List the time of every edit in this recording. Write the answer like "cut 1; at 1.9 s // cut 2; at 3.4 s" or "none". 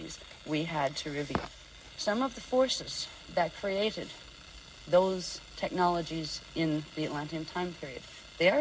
cut 1; at 1.9 s